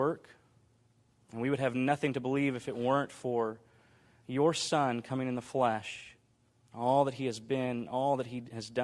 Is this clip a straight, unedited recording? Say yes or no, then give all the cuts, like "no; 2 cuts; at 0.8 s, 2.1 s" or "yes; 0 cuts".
yes; 0 cuts